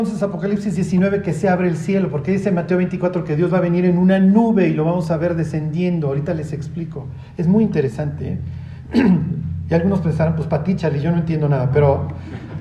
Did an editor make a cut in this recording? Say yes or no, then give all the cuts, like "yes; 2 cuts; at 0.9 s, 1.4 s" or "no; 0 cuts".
no; 0 cuts